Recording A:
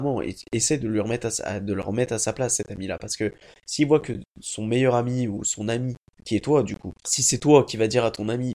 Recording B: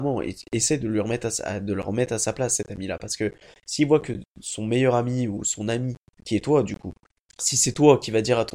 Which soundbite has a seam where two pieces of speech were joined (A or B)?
A